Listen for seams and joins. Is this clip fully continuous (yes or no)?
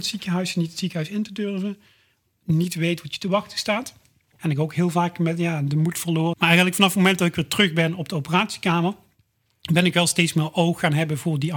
no